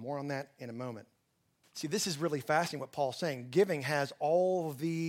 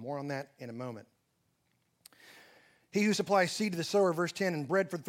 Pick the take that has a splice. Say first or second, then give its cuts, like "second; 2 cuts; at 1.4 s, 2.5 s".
first; 1 cut; at 1.6 s